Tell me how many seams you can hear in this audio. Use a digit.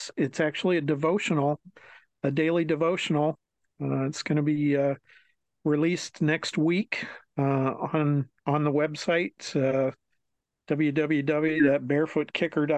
1